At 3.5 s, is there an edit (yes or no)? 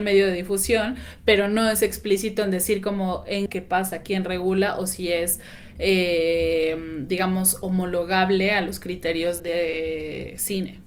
yes